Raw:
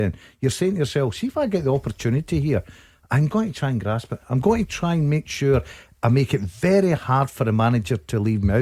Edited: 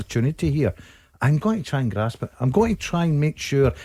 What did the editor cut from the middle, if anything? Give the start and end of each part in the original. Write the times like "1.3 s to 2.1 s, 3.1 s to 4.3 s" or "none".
none